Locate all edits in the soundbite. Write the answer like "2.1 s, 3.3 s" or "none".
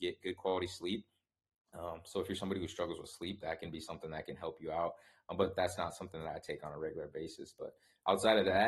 none